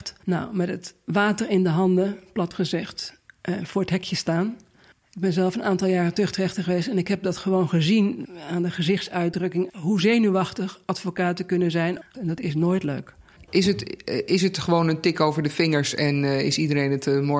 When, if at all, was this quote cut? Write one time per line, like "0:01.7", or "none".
0:09.7
0:12.1
0:13.5